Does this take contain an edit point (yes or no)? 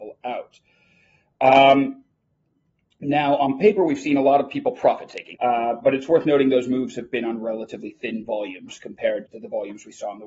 yes